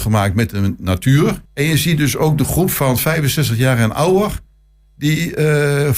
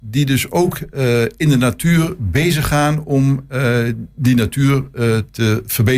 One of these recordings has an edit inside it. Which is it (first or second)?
first